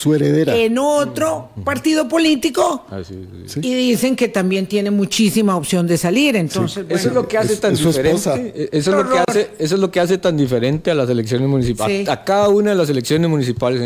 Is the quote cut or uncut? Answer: uncut